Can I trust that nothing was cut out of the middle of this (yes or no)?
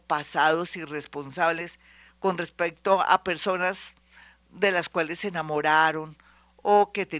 yes